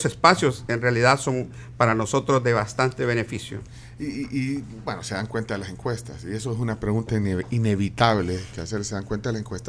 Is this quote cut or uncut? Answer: uncut